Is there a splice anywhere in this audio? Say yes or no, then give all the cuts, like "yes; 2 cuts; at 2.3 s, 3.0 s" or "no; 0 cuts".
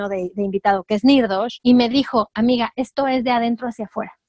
no; 0 cuts